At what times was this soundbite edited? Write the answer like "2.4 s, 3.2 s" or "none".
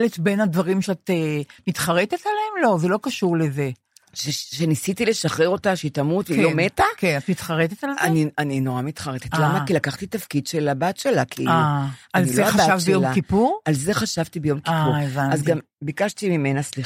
none